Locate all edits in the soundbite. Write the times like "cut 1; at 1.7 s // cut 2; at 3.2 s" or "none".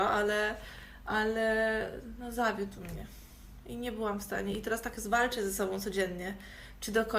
none